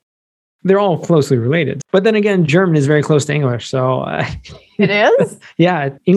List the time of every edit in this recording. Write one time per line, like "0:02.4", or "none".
0:01.8